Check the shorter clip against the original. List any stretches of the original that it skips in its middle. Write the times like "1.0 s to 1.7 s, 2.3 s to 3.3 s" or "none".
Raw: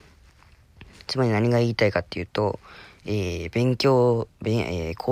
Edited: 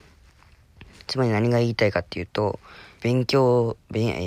3.0 s to 3.5 s